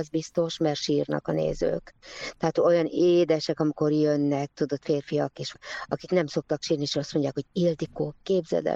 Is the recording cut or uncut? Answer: uncut